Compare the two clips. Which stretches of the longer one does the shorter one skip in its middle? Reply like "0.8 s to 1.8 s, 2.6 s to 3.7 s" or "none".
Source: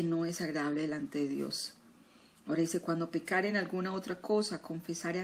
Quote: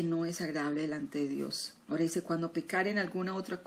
1.8 s to 2.4 s